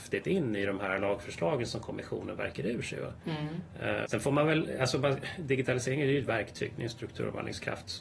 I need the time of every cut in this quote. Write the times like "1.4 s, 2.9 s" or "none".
4.0 s